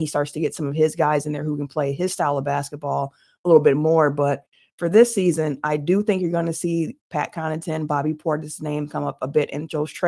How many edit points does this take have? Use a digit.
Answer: 0